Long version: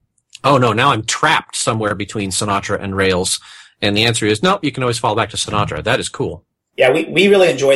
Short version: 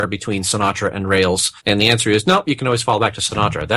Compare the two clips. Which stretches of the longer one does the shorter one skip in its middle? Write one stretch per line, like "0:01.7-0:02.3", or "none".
0:03.5-0:03.7